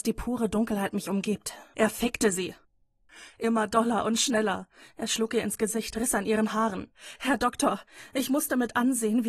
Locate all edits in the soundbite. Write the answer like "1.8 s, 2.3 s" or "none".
1.7 s